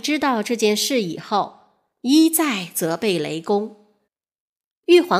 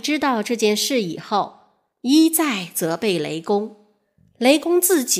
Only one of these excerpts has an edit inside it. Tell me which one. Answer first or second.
first